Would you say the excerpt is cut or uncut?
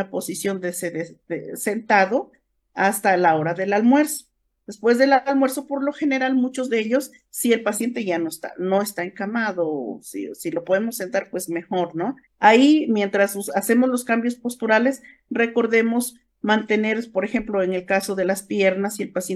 cut